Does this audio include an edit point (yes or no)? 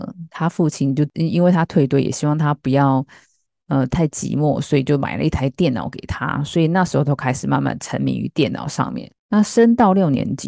no